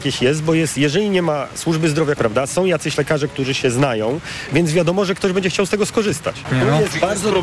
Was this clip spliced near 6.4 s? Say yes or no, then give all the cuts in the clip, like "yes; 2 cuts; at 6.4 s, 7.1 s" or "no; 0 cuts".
no; 1 cut; at 2.2 s